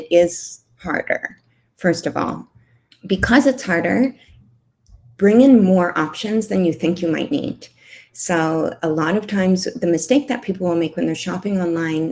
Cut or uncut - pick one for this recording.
cut